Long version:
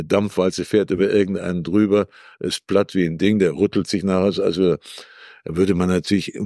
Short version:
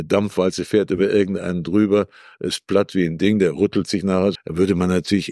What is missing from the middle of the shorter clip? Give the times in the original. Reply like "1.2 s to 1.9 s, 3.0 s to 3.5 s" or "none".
4.4 s to 5.3 s